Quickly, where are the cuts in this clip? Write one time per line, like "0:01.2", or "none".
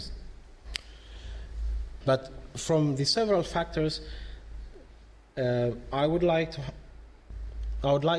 0:02.0